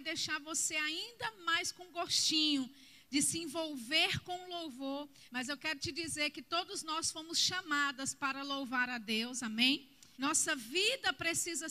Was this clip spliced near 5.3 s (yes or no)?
yes